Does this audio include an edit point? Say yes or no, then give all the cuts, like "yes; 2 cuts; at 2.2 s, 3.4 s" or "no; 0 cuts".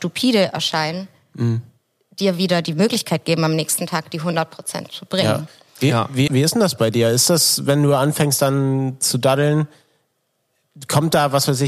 yes; 1 cut; at 6.3 s